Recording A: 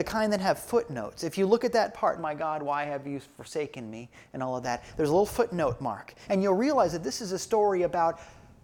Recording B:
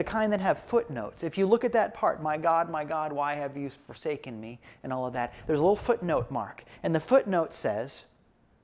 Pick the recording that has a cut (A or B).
A